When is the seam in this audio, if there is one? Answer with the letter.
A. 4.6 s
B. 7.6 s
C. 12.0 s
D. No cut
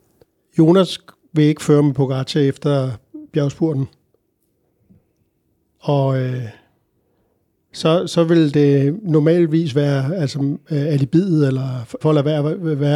C